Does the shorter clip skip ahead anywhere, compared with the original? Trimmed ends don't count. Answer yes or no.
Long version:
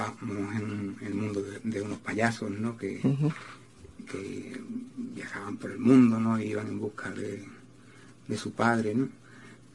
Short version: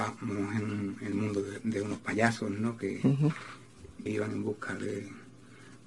yes